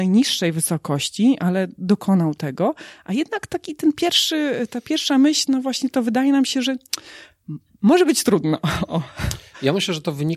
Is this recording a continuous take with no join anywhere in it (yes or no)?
yes